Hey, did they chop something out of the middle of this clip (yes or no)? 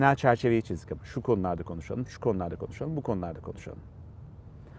no